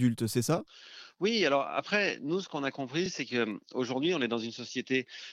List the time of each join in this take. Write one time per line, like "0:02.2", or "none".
none